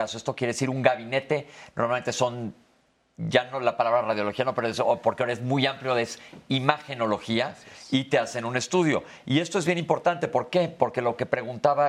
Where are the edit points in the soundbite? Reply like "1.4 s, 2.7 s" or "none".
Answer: none